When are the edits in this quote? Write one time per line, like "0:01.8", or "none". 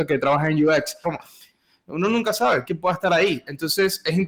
0:01.0
0:02.6